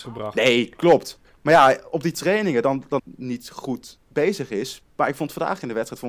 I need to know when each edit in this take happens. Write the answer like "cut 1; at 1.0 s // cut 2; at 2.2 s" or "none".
cut 1; at 3.0 s